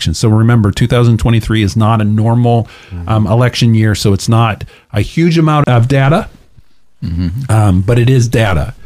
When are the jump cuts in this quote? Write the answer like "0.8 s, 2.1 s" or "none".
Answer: 5.6 s